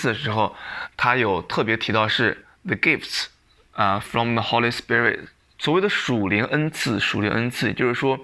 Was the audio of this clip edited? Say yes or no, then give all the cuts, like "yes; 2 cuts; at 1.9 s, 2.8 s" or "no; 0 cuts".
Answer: yes; 1 cut; at 5.6 s